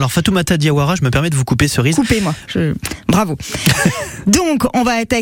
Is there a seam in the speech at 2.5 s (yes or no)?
yes